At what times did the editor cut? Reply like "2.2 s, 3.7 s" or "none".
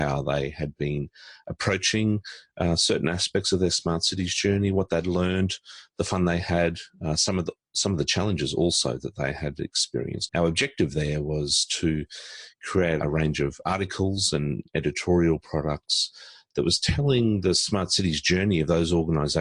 10.3 s, 13.0 s

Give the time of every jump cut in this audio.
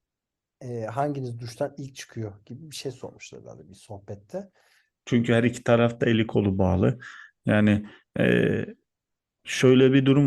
5.0 s

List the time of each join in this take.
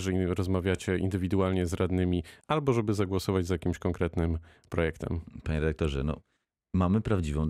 2.4 s

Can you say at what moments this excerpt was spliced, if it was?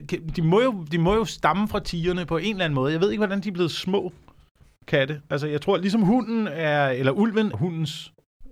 7.5 s

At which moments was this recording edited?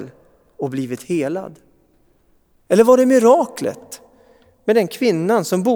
2.6 s

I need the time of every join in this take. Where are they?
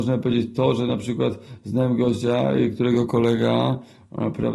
none

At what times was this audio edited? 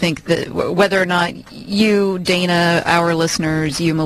none

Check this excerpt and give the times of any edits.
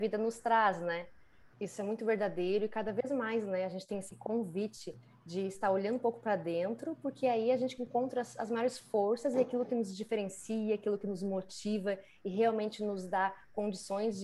1.5 s

